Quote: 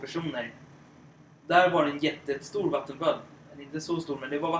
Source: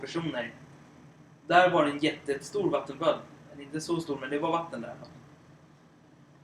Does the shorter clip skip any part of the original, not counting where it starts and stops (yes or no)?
no